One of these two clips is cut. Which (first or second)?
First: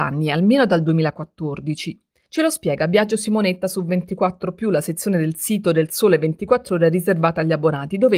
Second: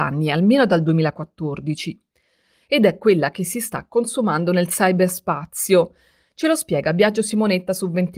first